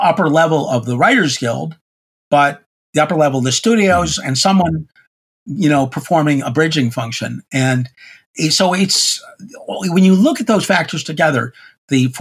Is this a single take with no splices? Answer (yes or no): yes